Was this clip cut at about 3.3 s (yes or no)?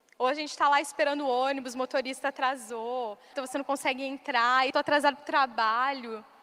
yes